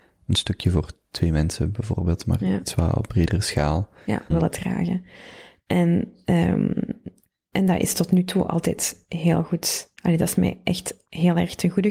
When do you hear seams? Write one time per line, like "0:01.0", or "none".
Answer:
0:04.3
0:10.0